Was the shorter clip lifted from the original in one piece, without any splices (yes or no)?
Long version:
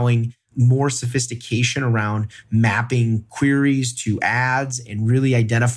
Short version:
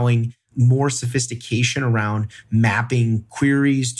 yes